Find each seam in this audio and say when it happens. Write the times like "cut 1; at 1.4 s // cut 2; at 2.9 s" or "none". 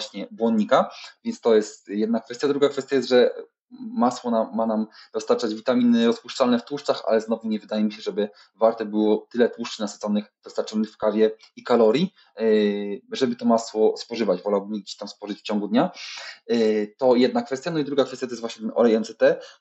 none